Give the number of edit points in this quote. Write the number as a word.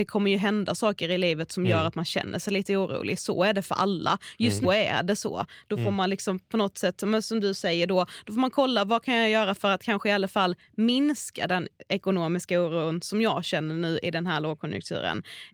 one